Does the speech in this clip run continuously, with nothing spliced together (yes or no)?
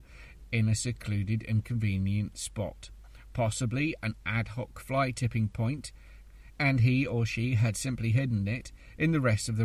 yes